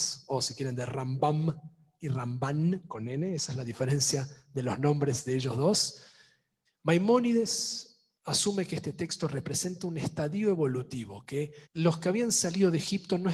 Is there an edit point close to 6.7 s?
yes; 3 cuts; at 6.7 s, 8.1 s, 11.6 s

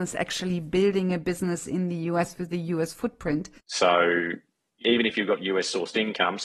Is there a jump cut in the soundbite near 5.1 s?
no; 1 cut; at 3.6 s

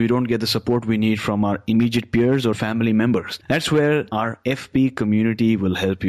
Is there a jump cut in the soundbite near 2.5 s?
yes; 1 cut; at 2.5 s

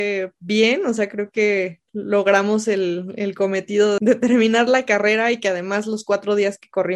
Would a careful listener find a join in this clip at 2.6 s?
no; 1 cut; at 4.0 s

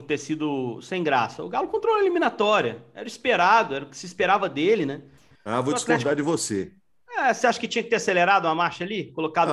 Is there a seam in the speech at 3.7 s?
no; 0 cuts

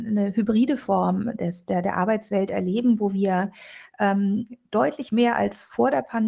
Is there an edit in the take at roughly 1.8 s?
yes; 1 cut; at 1.8 s

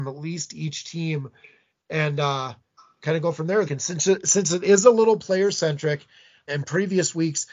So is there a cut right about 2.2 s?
no; 2 cuts; at 3.6 s, 6.5 s

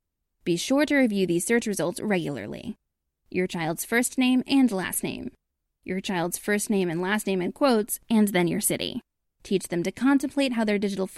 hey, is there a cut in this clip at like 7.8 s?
no; 2 cuts; at 5.7 s, 9.3 s

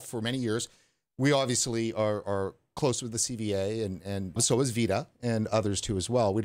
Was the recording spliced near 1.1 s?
no; 1 cut; at 4.4 s

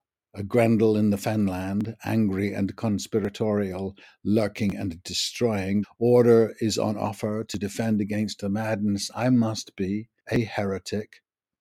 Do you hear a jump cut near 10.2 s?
yes; 2 cuts; at 5.8 s, 10.2 s

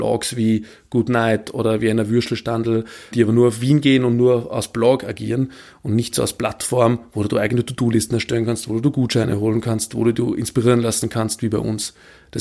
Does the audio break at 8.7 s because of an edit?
no; 1 cut; at 3.1 s

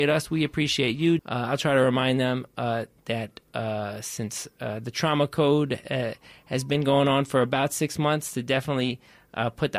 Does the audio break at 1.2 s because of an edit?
yes; 1 cut; at 1.2 s

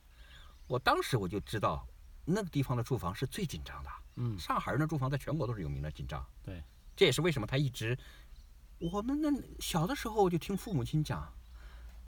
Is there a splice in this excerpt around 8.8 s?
yes; 1 cut; at 8.8 s

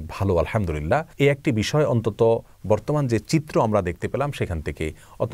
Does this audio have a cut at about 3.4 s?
no; 1 cut; at 1.1 s

